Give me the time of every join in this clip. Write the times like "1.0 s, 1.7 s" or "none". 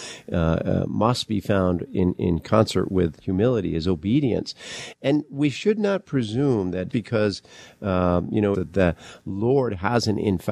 6.9 s, 8.5 s